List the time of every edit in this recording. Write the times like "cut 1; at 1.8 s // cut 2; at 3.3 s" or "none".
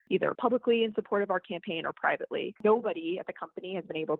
cut 1; at 2.6 s